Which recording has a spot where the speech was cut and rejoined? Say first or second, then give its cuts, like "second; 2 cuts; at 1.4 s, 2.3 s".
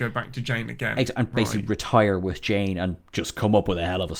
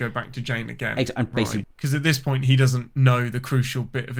second; 1 cut; at 1.6 s